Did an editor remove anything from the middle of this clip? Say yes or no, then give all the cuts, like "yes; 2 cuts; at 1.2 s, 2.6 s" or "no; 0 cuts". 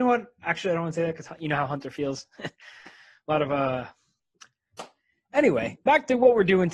no; 0 cuts